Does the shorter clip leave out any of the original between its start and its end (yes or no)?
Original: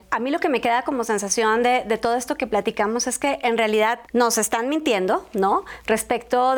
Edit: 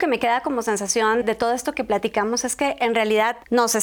yes